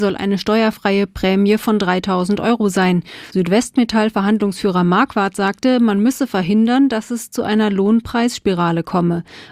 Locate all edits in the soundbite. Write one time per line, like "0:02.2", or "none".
none